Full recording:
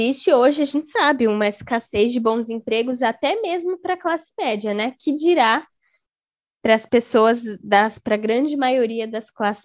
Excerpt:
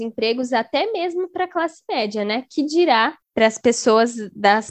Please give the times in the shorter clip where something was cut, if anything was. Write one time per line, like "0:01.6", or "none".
0:03.2